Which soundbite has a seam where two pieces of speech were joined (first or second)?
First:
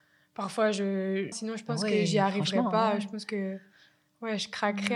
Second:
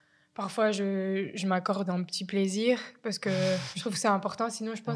first